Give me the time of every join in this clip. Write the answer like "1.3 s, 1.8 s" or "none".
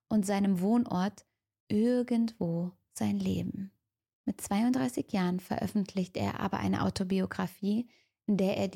none